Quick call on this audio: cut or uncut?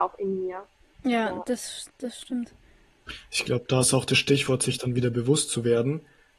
cut